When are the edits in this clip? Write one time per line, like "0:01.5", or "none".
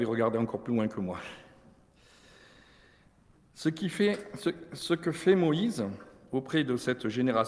none